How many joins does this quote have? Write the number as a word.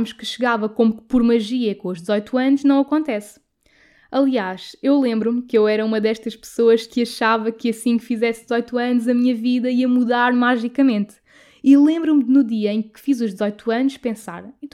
zero